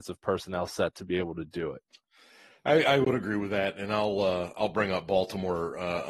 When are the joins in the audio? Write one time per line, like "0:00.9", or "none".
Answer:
none